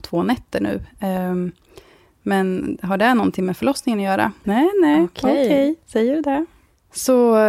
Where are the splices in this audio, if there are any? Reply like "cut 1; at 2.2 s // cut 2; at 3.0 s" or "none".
cut 1; at 4.4 s